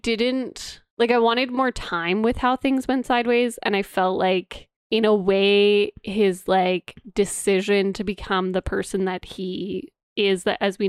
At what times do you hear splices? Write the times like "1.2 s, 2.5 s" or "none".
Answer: none